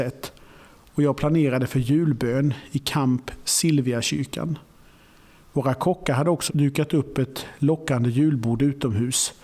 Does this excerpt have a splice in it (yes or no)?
yes